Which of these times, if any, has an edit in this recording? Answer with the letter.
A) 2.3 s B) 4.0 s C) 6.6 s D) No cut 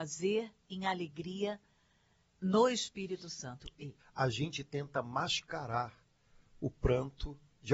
B